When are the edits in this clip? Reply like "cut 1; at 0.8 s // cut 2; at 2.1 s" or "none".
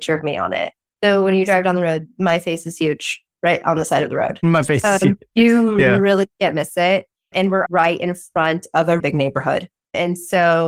cut 1; at 7.7 s // cut 2; at 9.0 s